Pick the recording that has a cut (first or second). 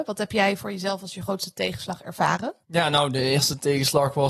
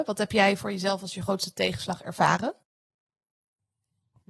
first